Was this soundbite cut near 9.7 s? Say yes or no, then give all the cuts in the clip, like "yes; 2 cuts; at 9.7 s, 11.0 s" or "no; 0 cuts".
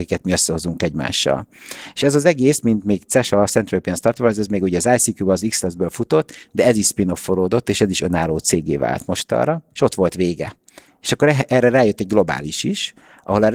yes; 1 cut; at 9.7 s